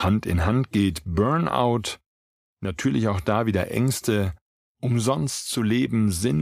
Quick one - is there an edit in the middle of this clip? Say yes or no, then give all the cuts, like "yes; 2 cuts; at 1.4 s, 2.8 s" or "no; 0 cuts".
no; 0 cuts